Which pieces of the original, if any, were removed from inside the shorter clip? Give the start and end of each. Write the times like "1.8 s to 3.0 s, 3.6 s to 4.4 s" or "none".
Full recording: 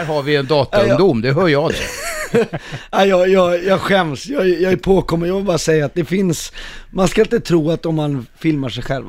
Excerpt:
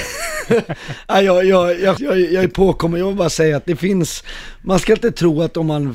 3.8 s to 4.3 s